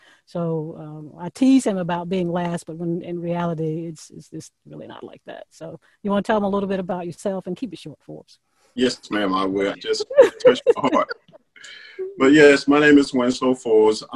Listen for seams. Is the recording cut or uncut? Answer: cut